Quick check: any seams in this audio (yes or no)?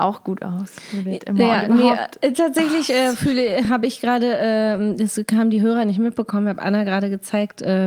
no